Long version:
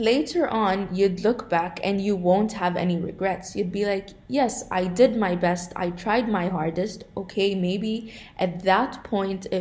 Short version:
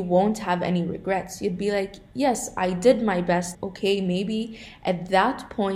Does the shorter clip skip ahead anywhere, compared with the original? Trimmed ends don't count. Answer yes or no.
yes